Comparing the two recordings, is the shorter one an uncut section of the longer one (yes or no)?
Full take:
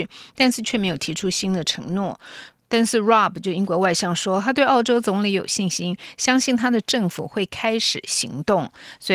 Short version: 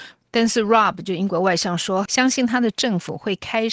no